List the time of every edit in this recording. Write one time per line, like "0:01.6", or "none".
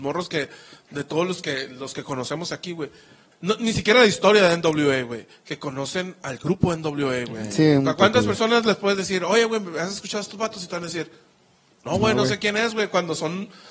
0:03.3